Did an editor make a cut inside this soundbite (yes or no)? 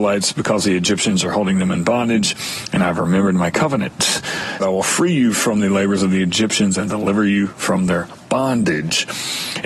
yes